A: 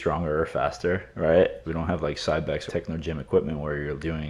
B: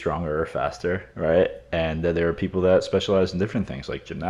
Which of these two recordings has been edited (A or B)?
A